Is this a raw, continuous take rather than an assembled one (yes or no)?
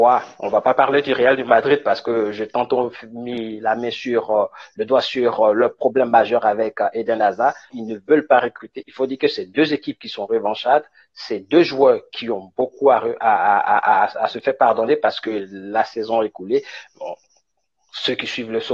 no